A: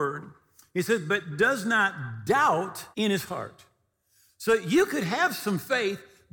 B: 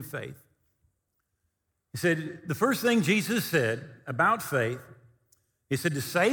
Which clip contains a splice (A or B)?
A